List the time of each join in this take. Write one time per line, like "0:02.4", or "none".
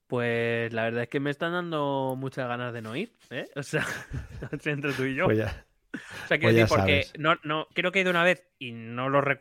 0:07.7